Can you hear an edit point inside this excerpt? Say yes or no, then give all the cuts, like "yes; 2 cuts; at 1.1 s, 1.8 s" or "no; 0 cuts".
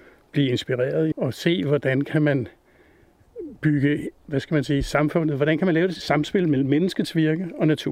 yes; 1 cut; at 1.1 s